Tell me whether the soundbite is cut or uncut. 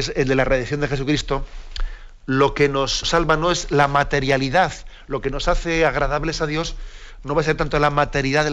cut